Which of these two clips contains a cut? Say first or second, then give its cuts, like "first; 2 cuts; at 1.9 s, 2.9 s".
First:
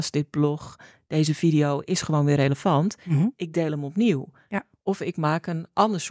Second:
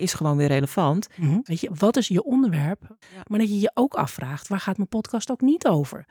second; 2 cuts; at 1.5 s, 3.0 s